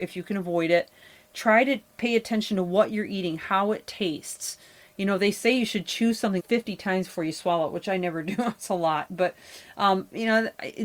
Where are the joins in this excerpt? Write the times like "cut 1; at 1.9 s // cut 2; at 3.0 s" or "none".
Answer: cut 1; at 6.4 s